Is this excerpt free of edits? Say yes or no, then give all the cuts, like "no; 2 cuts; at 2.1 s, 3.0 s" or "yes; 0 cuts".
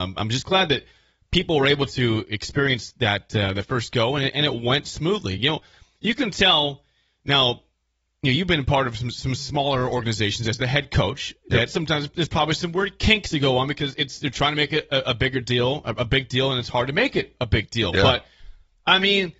yes; 0 cuts